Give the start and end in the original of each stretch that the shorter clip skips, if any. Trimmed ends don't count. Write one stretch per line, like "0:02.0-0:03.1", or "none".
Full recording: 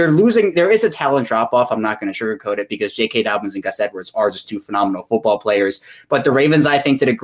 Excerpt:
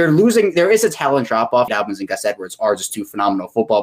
0:01.7-0:03.2